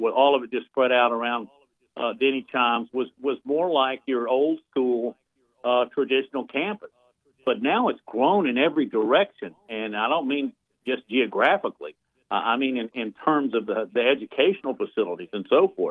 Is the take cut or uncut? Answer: uncut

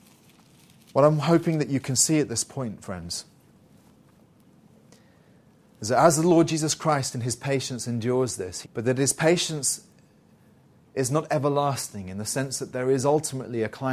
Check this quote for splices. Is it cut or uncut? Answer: cut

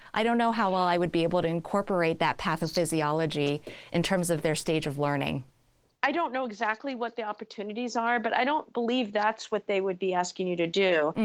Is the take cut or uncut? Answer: uncut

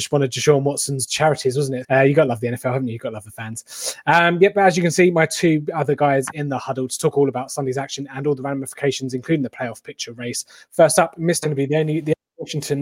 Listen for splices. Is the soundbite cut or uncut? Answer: cut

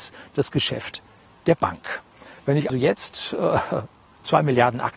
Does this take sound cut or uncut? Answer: cut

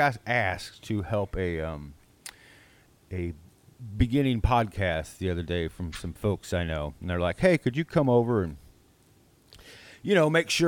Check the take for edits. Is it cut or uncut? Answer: uncut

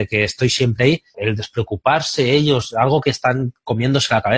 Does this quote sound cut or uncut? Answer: cut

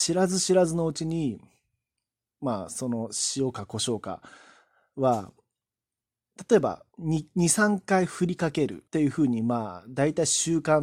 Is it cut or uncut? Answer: cut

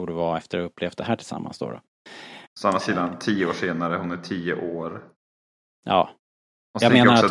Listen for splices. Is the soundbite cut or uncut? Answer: cut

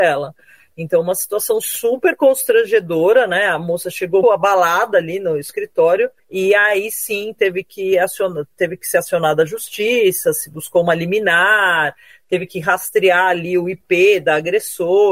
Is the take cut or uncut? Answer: cut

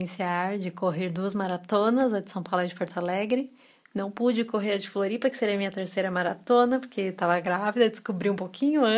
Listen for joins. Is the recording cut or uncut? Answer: uncut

